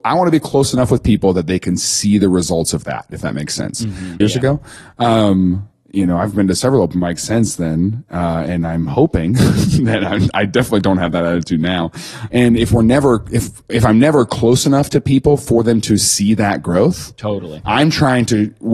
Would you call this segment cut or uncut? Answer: cut